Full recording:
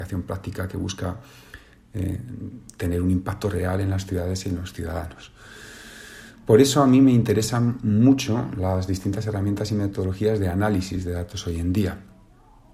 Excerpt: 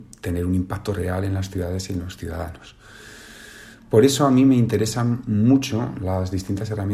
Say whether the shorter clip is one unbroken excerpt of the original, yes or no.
yes